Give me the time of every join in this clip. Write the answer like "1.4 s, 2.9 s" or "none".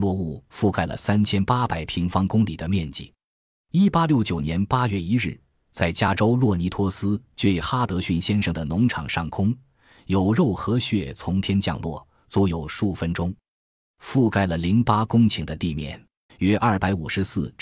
16.3 s